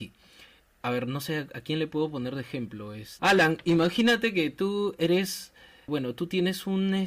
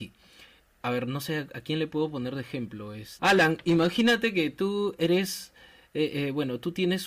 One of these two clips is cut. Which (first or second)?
first